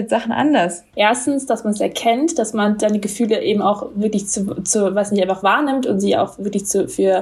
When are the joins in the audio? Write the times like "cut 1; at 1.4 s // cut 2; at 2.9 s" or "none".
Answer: cut 1; at 0.9 s